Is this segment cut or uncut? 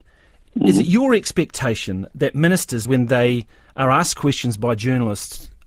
uncut